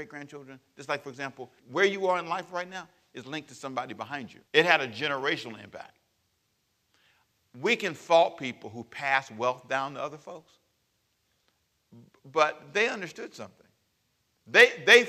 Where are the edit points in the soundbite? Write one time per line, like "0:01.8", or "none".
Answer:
0:01.6
0:04.5